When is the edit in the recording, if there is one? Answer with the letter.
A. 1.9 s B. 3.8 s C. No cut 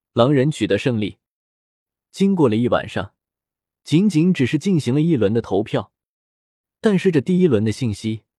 A